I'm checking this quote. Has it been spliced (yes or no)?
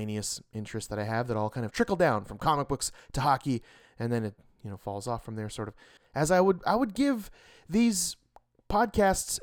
yes